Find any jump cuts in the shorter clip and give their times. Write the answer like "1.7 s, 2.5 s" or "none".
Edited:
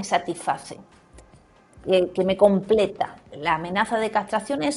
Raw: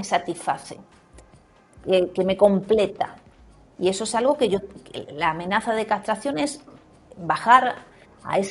3.3 s